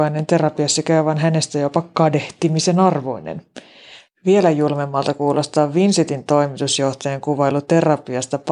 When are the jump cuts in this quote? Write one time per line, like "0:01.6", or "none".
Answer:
0:04.1

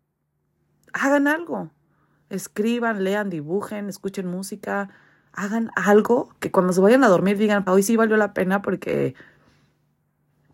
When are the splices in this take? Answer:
0:06.3
0:07.7

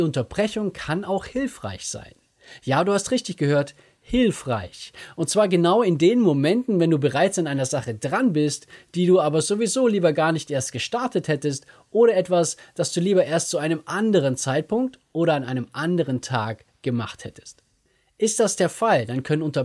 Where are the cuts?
none

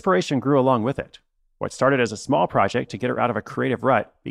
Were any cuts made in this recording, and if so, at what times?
none

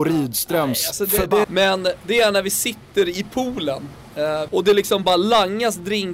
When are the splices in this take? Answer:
0:01.4
0:04.5

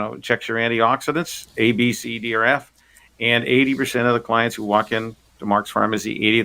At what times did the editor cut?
none

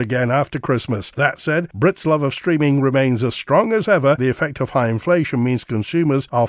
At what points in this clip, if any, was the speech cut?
0:01.1
0:04.2

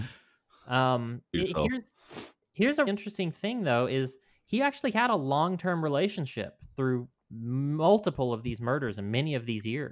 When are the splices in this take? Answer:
0:01.3
0:02.9

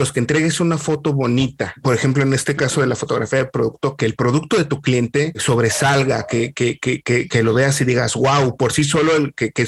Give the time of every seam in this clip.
none

